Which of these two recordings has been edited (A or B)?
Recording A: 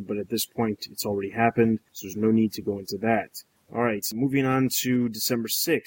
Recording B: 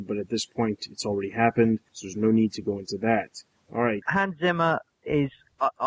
B